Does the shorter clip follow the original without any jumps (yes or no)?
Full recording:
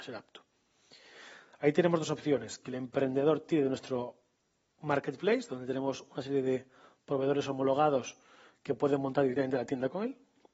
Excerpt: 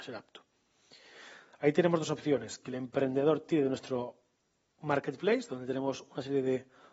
yes